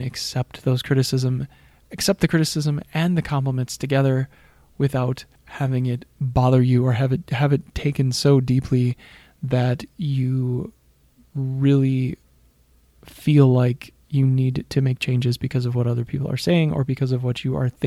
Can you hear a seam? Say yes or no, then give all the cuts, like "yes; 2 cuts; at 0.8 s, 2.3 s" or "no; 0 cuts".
yes; 1 cut; at 5.4 s